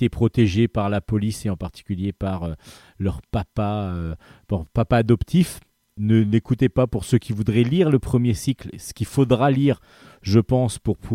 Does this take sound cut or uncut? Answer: cut